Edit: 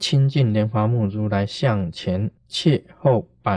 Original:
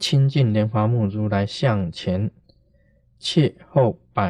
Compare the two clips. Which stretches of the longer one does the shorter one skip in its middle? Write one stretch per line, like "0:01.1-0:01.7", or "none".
0:02.4-0:03.1